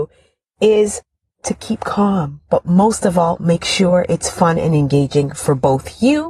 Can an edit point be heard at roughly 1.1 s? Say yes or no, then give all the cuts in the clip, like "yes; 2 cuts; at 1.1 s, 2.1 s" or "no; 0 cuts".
no; 1 cut; at 2.5 s